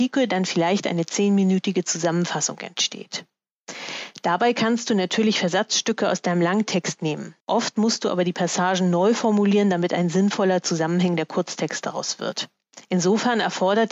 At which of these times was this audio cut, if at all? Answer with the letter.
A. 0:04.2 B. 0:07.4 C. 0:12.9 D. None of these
B